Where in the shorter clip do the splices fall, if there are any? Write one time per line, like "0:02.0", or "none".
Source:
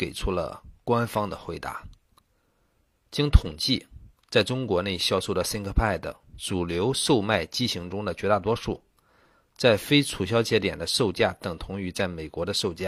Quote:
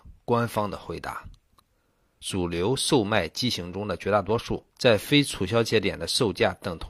0:02.2
0:04.7

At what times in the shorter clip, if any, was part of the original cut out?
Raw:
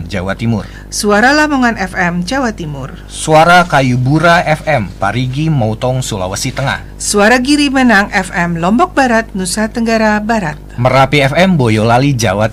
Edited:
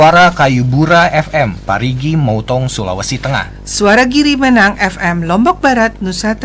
none

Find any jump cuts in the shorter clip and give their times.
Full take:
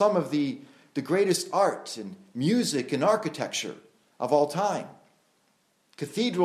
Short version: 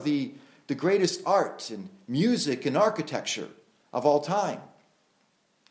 none

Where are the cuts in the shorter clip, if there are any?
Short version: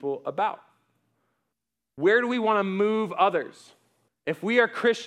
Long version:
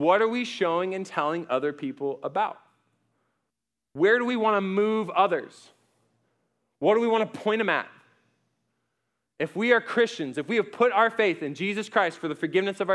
0:04.1

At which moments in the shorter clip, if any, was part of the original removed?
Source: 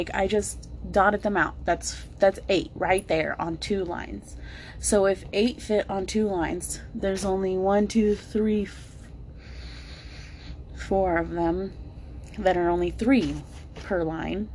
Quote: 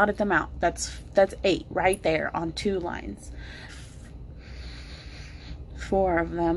0:03.7

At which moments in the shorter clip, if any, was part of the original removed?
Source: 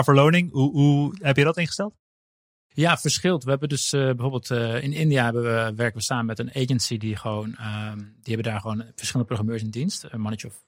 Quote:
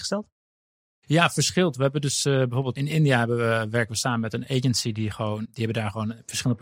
0:02.8
0:05.4

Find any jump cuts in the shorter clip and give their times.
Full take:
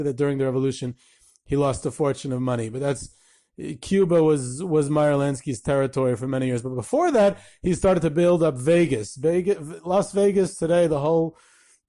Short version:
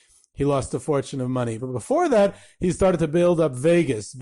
0:01.6

